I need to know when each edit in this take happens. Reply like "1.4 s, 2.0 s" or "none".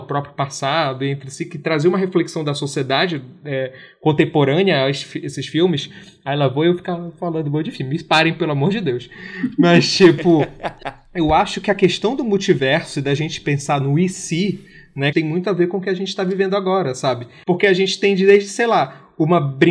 15.1 s, 17.4 s